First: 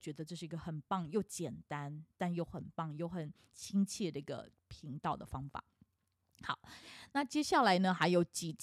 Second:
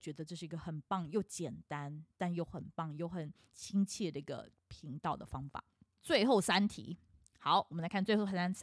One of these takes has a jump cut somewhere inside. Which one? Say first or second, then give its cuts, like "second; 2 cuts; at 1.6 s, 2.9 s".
second; 1 cut; at 6.0 s